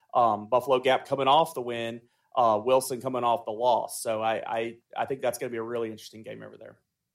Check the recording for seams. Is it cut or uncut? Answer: uncut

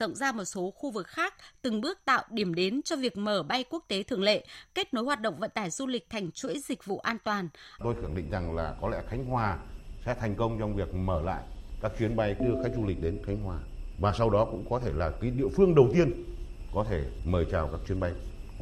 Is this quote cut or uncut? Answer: cut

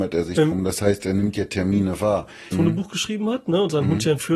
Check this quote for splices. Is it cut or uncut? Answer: cut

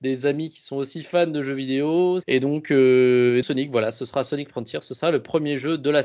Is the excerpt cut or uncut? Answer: cut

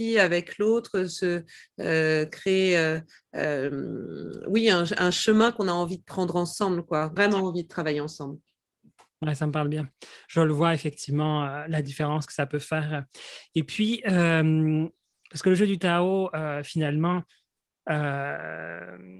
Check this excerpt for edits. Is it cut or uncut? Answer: cut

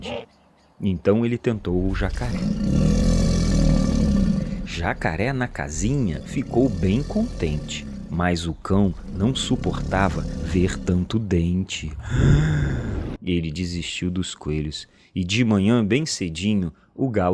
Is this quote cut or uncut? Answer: cut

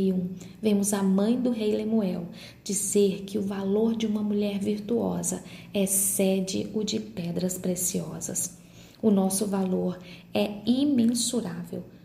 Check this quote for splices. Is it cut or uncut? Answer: uncut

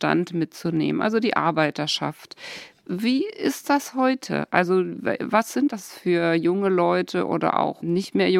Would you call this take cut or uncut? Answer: uncut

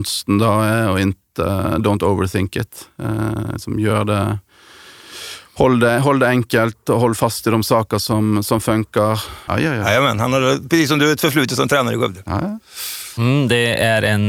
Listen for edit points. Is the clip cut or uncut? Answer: cut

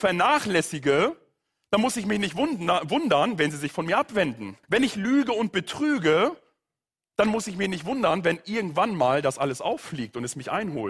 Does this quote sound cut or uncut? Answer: cut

